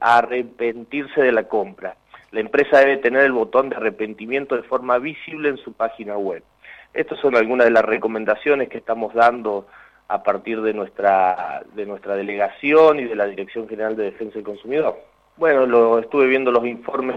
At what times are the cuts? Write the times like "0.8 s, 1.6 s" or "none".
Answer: 15.3 s